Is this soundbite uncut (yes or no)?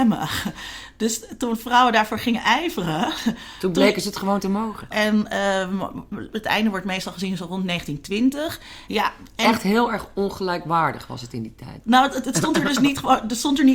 no